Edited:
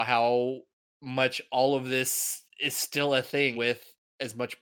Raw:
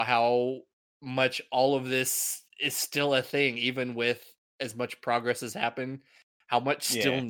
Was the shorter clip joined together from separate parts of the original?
yes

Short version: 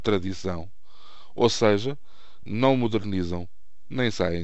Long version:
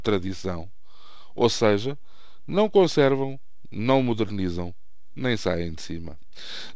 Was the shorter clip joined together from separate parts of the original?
yes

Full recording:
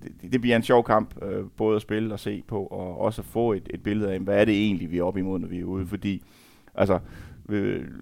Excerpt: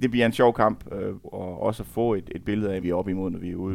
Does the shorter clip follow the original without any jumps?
no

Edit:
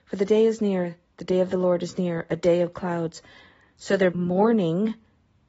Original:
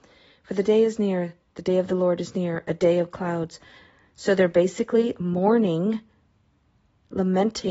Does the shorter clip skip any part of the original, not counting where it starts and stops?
yes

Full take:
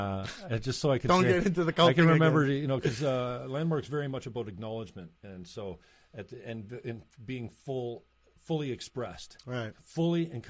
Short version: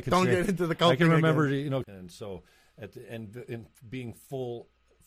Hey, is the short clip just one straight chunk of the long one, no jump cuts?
no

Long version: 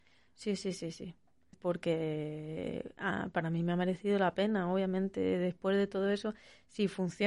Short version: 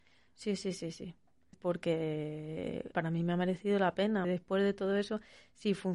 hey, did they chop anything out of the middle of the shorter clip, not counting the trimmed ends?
yes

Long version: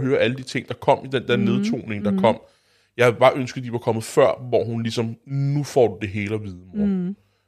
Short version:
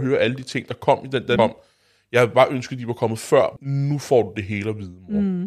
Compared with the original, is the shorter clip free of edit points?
no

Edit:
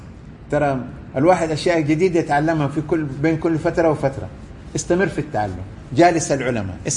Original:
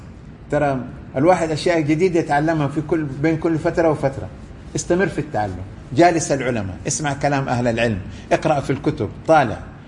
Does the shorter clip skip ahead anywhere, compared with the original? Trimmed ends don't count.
no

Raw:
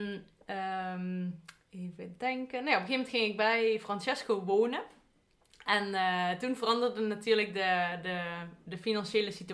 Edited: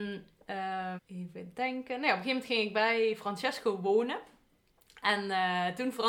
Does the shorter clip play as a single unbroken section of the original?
no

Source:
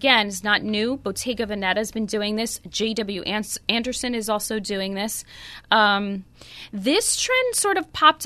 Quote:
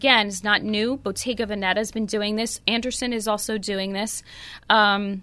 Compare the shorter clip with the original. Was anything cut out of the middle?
yes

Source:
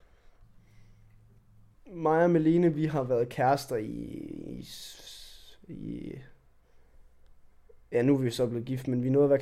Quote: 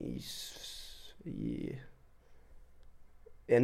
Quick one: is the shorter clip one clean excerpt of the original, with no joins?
yes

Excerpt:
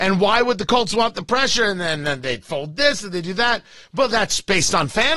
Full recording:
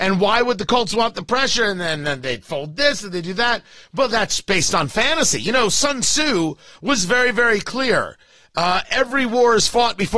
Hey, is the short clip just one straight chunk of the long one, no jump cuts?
yes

